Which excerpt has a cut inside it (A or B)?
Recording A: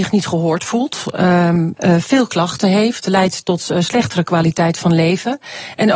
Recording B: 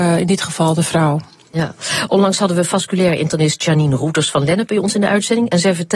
A